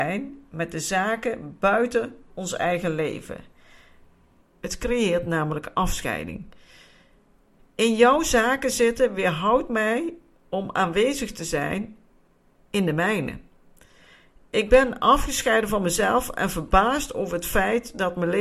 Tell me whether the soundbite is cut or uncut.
cut